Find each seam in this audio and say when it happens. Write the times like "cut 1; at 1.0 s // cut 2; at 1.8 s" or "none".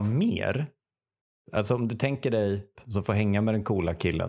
cut 1; at 2.7 s

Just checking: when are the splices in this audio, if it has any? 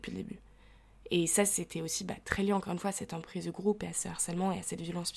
none

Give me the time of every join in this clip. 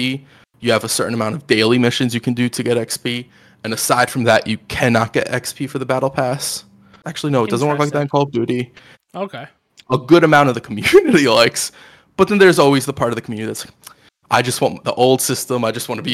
cut 1; at 7.0 s // cut 2; at 8.9 s

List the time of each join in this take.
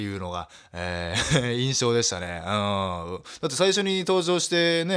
none

